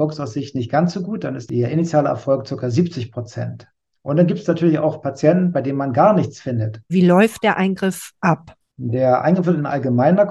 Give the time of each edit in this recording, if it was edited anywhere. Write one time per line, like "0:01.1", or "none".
0:06.9